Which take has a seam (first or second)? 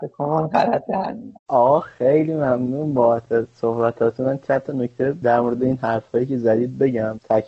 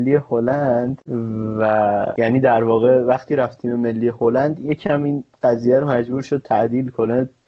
first